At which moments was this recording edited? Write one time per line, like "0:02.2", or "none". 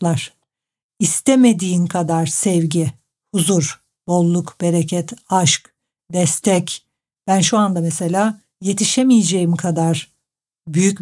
none